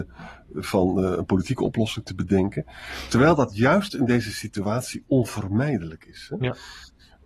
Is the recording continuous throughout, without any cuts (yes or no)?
yes